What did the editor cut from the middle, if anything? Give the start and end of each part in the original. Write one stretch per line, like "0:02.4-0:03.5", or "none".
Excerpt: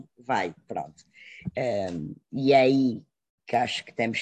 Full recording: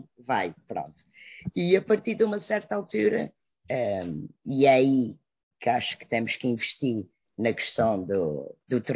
0:01.5-0:03.6